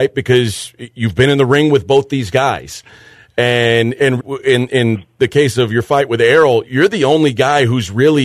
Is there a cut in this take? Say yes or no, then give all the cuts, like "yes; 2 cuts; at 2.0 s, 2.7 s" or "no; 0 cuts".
yes; 2 cuts; at 4.2 s, 6.6 s